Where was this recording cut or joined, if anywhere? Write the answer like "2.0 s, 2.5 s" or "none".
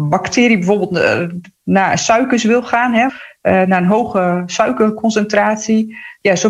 3.1 s